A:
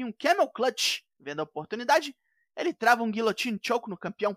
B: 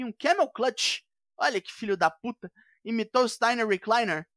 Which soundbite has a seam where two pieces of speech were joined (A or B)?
A